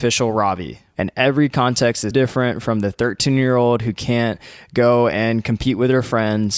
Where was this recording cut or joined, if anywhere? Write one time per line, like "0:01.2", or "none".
0:00.9
0:02.1